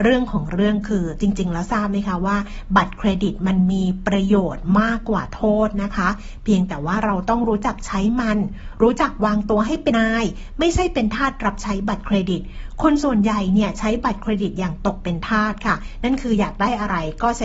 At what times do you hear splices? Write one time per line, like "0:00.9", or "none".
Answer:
0:09.9